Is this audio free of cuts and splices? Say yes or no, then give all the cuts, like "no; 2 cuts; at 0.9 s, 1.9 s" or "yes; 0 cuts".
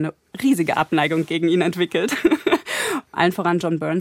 no; 1 cut; at 3.1 s